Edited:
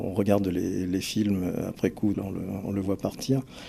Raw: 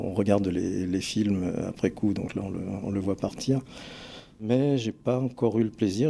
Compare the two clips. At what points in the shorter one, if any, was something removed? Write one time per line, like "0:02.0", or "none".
0:02.1